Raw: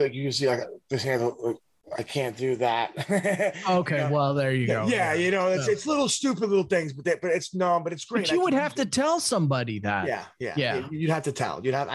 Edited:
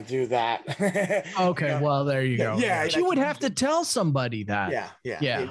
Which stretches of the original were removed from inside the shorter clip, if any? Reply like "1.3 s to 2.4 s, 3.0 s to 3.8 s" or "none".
5.2 s to 8.2 s